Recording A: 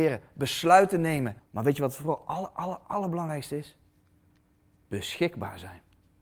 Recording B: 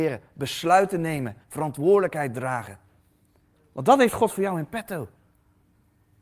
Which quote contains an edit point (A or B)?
A